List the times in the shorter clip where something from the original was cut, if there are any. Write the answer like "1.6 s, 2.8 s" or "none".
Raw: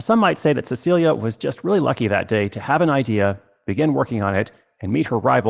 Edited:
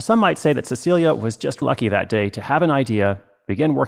1.6 s